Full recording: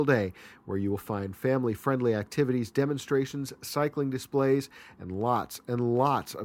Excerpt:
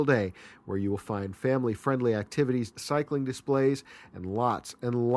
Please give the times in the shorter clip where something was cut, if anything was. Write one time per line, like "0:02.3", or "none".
0:02.7